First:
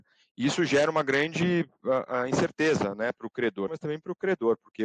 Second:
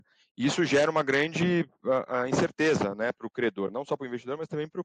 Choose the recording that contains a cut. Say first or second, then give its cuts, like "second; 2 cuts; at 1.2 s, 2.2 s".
first; 1 cut; at 3.7 s